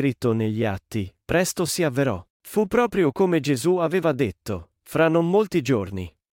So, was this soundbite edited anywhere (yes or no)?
yes